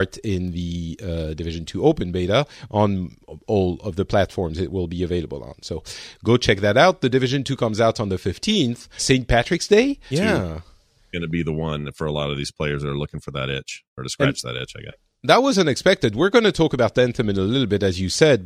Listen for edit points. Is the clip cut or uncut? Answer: cut